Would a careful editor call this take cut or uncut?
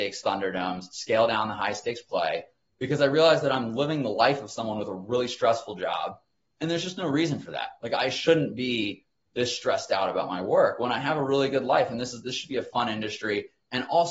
uncut